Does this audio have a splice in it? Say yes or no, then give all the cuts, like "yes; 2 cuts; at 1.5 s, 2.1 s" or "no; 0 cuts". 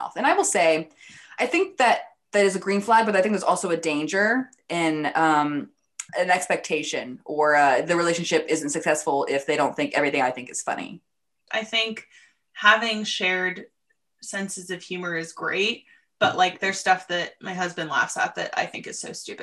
yes; 2 cuts; at 6.1 s, 11.5 s